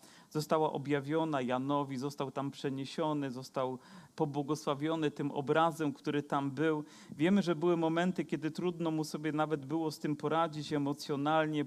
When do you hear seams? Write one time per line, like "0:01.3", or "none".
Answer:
0:04.1